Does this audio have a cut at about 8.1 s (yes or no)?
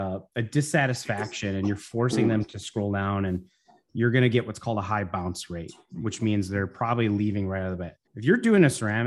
yes